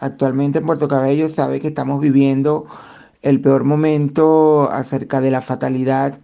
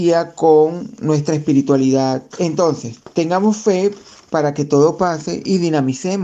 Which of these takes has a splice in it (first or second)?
second